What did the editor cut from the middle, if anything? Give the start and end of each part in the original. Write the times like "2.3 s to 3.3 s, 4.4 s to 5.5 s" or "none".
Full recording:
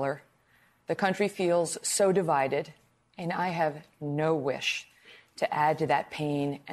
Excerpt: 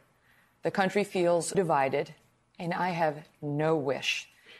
1.8 s to 2.1 s